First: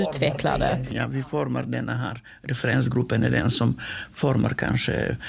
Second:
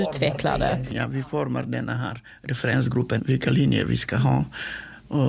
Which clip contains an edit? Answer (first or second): second